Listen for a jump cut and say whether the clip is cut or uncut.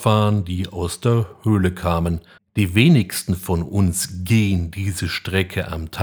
cut